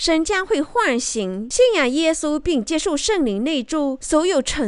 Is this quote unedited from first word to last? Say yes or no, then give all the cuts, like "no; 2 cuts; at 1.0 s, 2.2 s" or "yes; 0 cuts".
yes; 0 cuts